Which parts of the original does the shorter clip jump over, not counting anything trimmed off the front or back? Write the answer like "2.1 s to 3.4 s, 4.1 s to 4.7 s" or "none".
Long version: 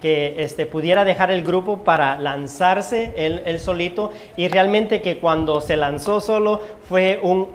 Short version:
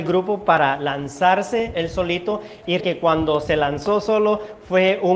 3.1 s to 3.4 s, 4.5 s to 5.0 s